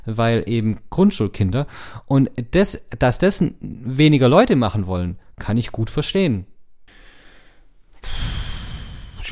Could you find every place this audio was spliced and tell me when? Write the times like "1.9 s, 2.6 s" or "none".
none